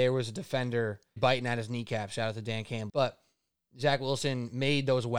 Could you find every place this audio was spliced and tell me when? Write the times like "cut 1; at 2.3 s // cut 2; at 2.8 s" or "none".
cut 1; at 1.2 s // cut 2; at 2.9 s